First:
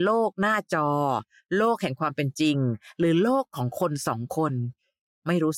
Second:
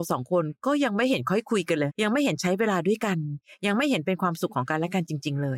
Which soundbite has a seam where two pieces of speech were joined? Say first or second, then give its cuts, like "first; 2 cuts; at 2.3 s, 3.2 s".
second; 1 cut; at 1.9 s